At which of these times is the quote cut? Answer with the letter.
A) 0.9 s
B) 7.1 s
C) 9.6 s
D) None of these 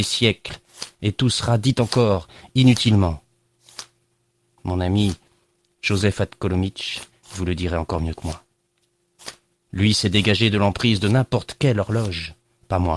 B